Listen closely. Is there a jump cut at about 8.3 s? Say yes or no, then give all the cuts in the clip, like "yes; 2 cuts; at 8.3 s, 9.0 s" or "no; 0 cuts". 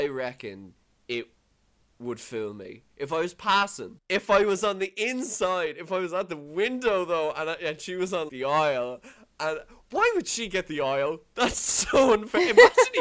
yes; 1 cut; at 8.3 s